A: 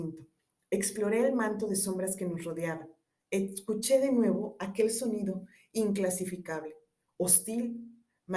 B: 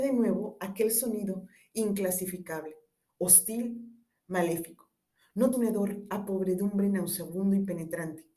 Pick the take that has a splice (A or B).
B